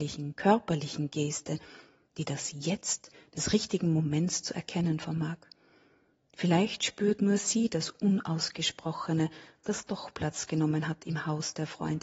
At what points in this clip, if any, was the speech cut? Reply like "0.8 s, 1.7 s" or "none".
none